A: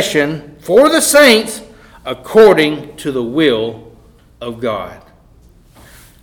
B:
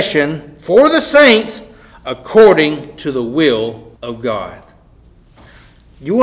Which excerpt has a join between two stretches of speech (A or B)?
B